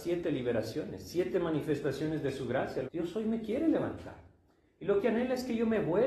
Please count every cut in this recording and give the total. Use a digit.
1